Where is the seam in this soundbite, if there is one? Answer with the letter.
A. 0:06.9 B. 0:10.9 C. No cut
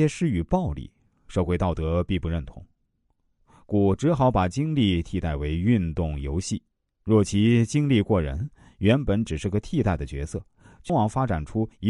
B